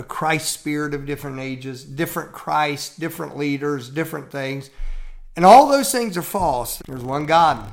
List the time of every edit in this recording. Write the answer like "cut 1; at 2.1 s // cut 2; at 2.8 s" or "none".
cut 1; at 6.8 s